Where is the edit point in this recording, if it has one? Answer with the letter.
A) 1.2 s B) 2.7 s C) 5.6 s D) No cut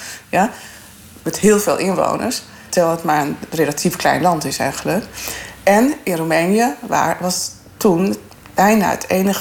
B